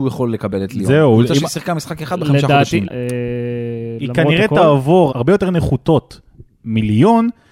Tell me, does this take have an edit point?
yes; 2 cuts; at 2.8 s, 5.1 s

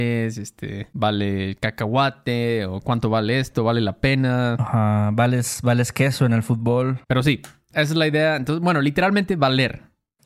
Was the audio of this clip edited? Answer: yes; 1 cut; at 7.1 s

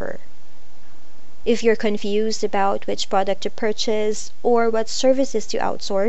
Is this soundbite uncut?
no; 1 cut; at 1.4 s

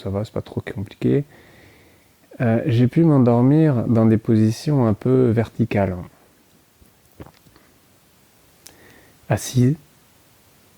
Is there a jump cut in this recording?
no; 0 cuts

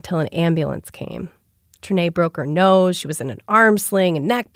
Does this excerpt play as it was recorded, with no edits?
yes; 0 cuts

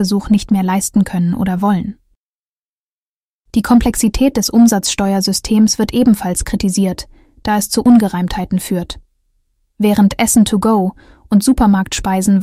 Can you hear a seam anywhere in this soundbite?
no; 0 cuts

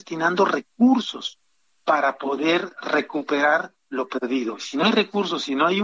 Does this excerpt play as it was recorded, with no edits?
yes; 0 cuts

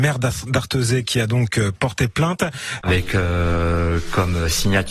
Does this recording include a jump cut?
yes; 1 cut; at 2.8 s

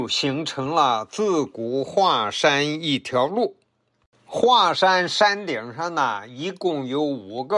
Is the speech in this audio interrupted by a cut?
no; 0 cuts

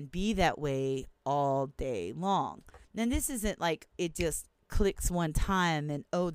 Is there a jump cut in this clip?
yes; 2 cuts; at 2.8 s, 3.9 s

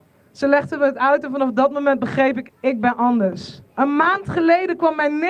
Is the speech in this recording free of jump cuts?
no; 1 cut; at 2.5 s

